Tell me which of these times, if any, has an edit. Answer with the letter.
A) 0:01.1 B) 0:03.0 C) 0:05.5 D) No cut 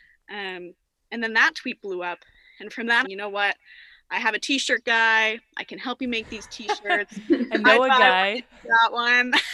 B